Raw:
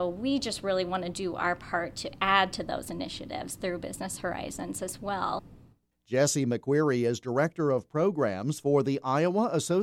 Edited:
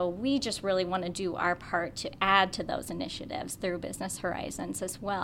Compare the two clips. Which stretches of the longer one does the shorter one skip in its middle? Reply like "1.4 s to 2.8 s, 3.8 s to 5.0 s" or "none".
none